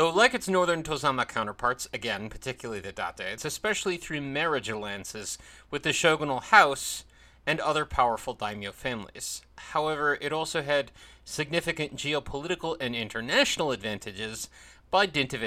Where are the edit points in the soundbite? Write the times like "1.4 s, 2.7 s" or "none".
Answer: 3.4 s

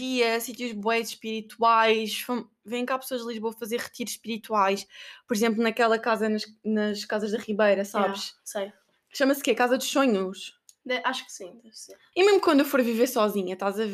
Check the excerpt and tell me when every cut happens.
12.1 s

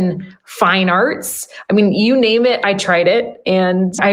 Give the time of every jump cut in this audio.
none

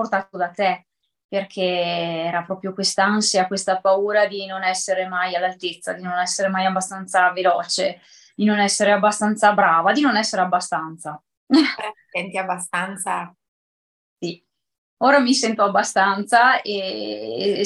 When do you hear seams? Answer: none

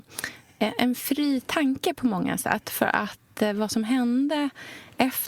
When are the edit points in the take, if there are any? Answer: none

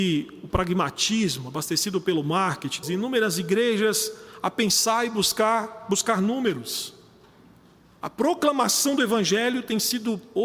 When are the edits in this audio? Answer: 2.8 s

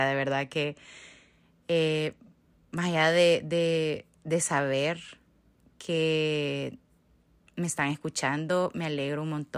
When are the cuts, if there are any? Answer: none

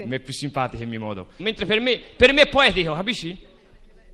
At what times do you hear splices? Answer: 1.4 s

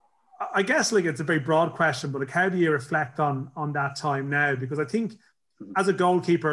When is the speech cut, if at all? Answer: none

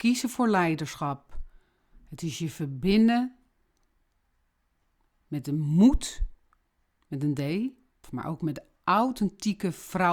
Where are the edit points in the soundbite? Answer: 8.0 s

